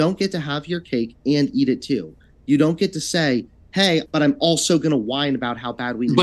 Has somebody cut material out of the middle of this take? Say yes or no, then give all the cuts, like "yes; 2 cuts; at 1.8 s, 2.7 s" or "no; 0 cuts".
yes; 1 cut; at 4.1 s